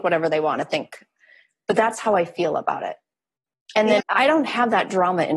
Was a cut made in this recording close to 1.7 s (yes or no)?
no